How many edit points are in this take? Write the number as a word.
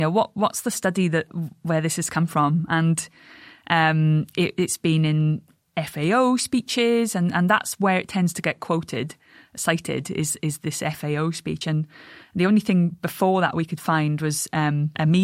zero